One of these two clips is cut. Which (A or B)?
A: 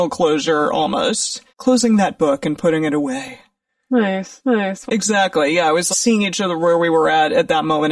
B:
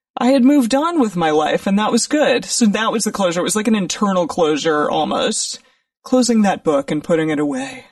A